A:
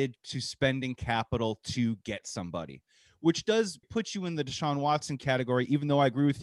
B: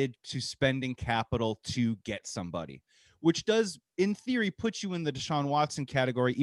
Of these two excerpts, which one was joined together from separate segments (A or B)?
A